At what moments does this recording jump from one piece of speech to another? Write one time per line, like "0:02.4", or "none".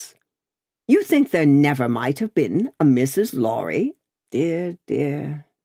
0:04.1

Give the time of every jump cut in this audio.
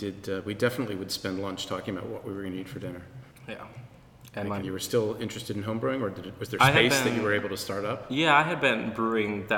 0:04.6

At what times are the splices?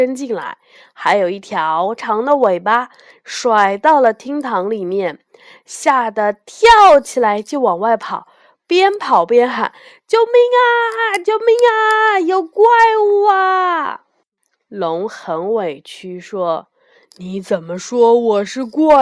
0:02.0

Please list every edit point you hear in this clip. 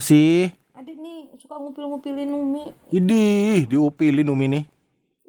none

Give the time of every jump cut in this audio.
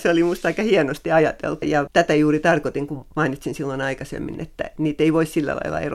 0:01.6
0:04.3

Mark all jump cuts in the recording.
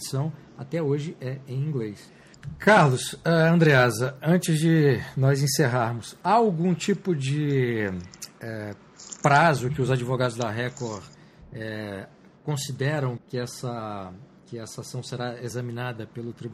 0:13.2

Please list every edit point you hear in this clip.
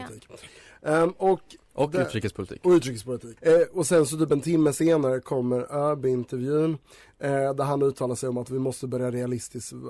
0:03.4

